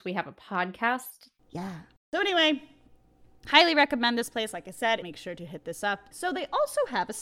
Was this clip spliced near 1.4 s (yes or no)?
no